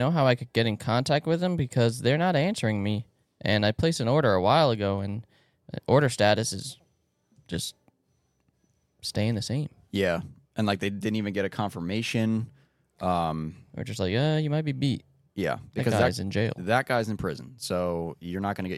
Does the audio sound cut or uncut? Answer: uncut